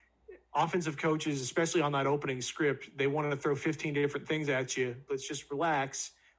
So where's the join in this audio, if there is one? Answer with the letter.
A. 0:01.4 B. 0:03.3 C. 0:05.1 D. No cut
C